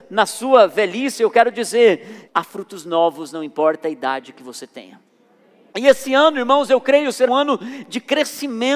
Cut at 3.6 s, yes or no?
no